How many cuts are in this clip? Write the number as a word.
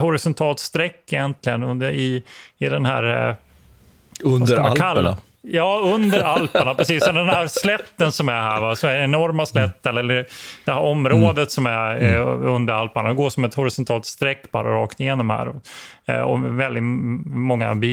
zero